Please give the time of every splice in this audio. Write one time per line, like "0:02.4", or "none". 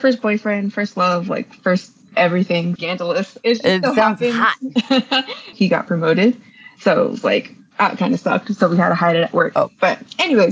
0:02.8
0:05.5